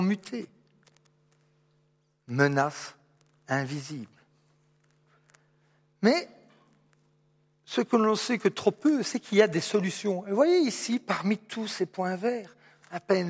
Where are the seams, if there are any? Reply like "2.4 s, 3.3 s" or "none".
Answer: none